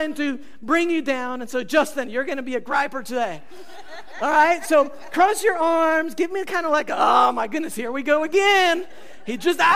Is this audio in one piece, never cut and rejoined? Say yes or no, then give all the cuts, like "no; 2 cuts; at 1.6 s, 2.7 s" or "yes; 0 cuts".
yes; 0 cuts